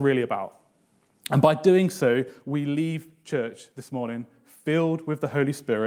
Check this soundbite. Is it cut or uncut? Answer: uncut